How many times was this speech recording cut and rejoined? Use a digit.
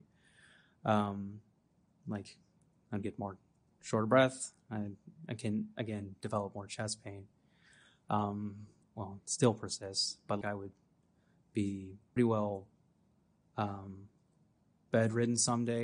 3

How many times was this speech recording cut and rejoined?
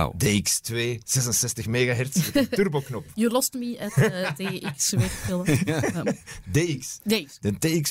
0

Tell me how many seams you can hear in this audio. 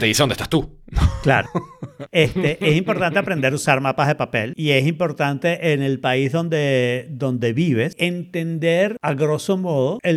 1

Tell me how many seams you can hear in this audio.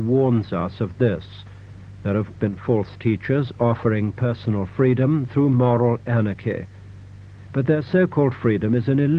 1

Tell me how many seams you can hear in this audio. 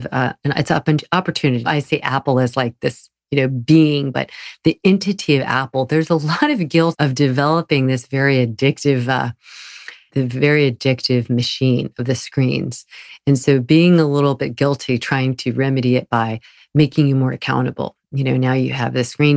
3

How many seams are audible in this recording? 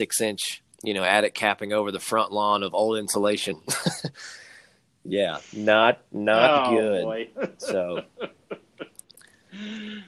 0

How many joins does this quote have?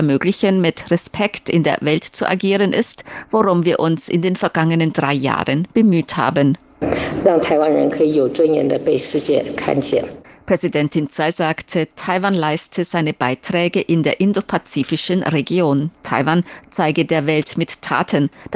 1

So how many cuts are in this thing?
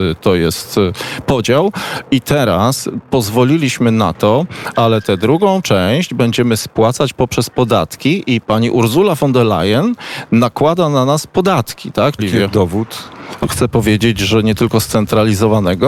3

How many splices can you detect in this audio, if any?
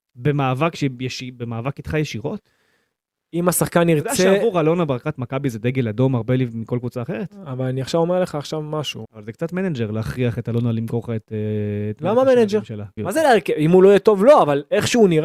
2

